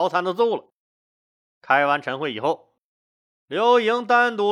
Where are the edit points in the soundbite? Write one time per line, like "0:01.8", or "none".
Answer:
none